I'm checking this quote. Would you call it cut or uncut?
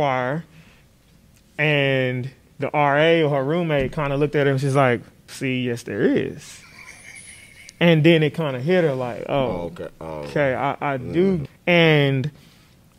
cut